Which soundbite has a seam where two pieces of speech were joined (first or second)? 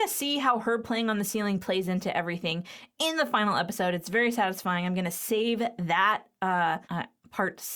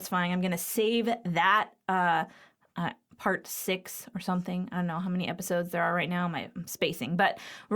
first